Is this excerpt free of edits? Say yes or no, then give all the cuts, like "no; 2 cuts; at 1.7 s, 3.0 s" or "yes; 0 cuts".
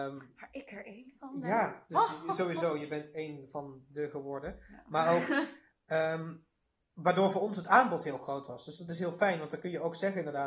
yes; 0 cuts